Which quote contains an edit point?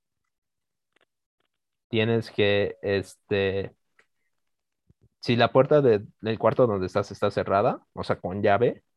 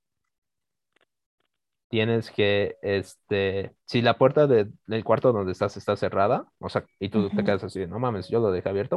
second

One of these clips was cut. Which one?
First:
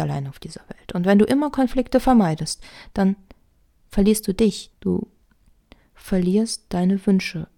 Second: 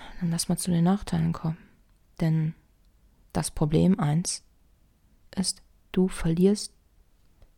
first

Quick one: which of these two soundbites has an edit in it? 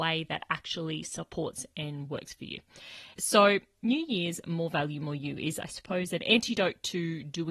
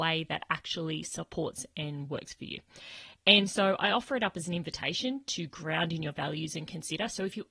first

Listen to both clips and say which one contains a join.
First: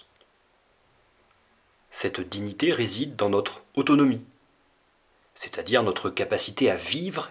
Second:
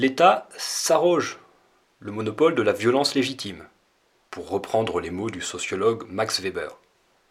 first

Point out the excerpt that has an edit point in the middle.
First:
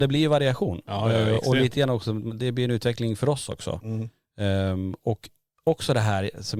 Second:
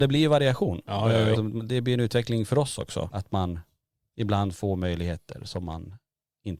second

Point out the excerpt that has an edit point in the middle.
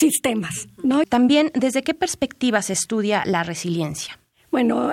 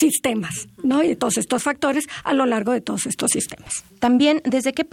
first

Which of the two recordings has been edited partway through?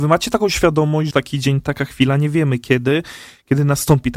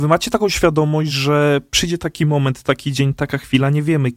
first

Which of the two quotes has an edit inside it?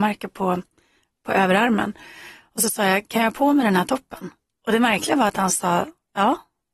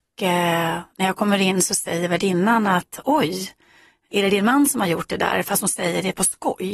first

